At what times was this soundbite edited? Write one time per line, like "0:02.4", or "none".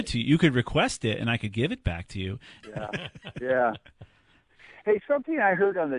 0:02.6